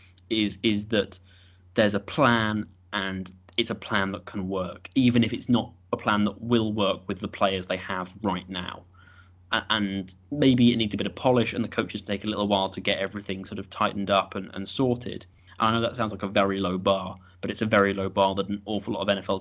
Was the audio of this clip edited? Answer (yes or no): yes